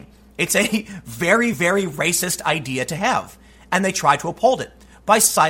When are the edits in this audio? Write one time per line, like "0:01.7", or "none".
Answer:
none